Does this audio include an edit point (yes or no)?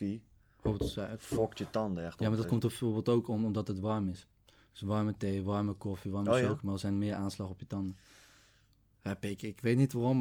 no